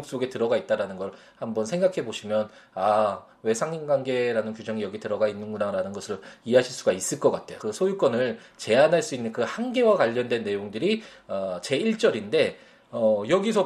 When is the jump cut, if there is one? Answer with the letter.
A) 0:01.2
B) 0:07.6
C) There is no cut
B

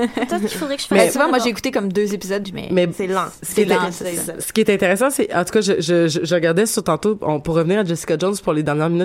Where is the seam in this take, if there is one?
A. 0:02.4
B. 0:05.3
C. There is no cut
A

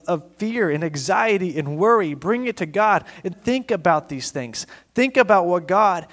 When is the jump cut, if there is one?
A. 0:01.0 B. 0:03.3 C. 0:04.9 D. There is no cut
B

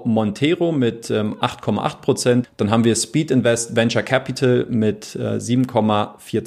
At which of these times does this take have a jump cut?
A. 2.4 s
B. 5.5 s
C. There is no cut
A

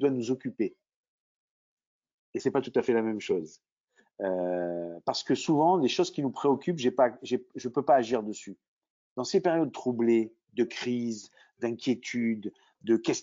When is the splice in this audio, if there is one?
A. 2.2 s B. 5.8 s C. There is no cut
C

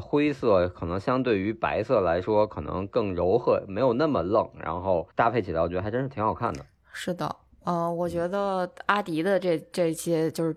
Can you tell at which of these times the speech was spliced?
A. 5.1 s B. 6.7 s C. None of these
A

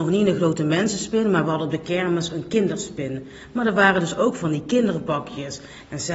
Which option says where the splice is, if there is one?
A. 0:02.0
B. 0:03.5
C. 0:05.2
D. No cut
D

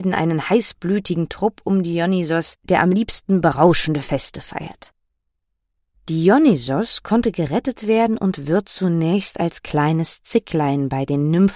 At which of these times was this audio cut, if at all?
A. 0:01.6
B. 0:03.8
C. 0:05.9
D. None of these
C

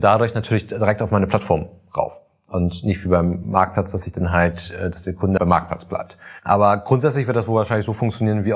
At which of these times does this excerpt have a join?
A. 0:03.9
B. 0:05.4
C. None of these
B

